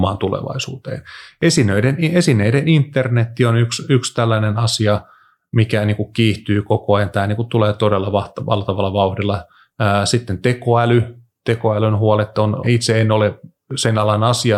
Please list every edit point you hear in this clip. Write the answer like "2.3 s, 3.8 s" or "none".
12.6 s